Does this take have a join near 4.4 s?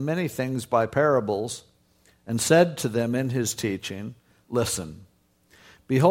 no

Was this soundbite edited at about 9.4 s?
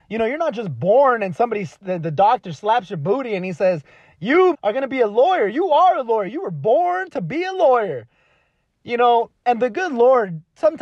no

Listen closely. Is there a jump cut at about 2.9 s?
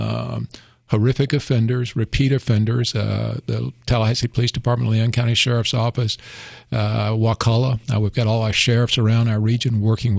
no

